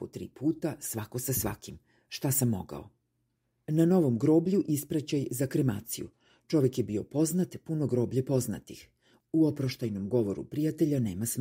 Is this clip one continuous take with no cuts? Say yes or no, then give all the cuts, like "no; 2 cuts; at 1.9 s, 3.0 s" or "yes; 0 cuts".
yes; 0 cuts